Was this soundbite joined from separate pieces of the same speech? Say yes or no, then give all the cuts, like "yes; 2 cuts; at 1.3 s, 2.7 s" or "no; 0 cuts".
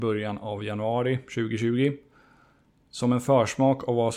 no; 0 cuts